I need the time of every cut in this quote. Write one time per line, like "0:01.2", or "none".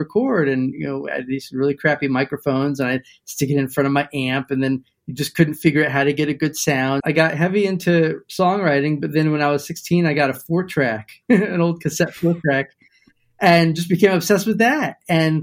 0:07.0